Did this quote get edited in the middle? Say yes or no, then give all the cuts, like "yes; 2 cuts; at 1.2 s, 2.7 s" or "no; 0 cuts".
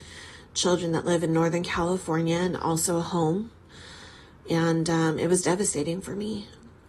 no; 0 cuts